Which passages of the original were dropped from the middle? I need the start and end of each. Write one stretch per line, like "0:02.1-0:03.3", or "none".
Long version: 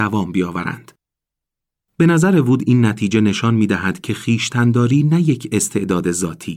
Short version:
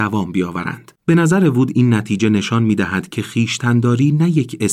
0:01.0-0:01.9